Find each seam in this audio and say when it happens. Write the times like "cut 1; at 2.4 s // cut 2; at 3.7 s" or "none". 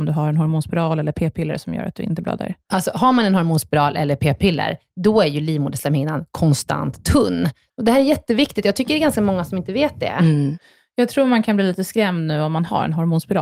cut 1; at 7.7 s